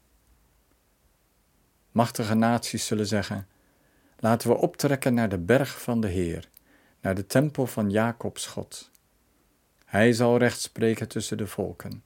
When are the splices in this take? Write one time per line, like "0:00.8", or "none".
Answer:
0:01.8
0:09.7